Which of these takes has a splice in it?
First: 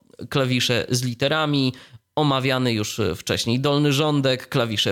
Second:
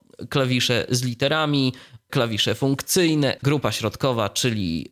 second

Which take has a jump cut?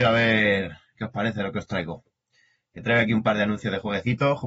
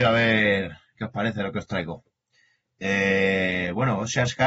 second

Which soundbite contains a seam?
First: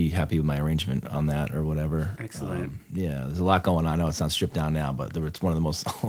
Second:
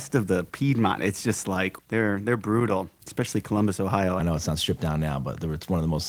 second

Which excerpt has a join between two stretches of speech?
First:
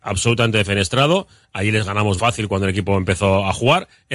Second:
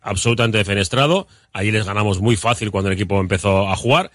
first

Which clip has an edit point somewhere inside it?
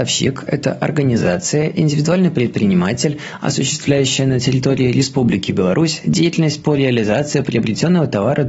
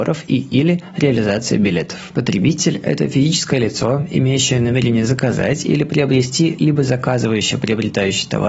second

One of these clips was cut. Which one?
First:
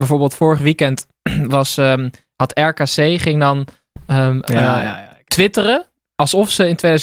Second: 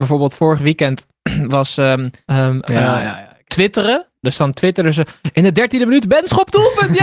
second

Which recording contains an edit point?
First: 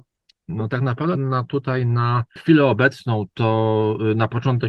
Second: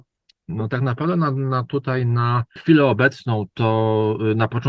first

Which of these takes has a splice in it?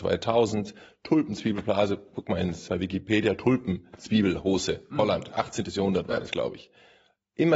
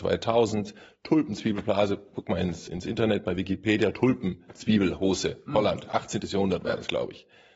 first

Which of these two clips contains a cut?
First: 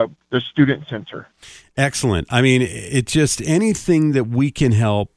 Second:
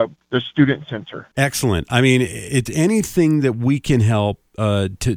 second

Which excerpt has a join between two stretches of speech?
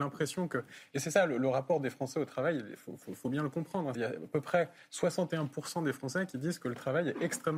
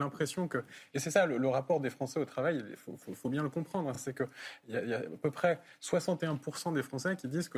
first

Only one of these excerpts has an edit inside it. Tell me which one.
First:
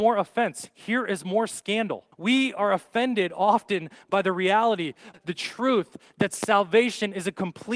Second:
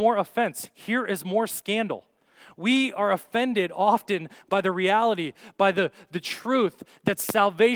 first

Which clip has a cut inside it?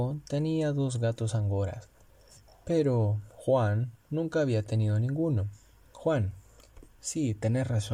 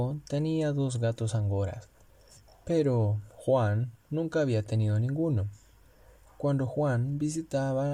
first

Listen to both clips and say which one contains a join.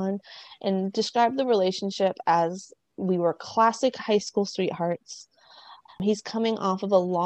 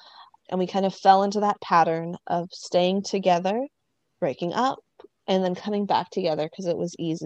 first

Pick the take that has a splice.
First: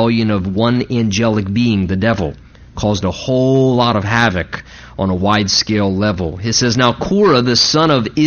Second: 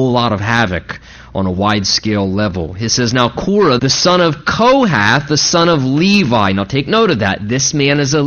second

